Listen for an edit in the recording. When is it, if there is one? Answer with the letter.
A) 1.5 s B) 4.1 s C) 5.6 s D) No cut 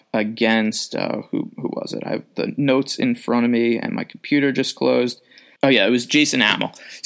C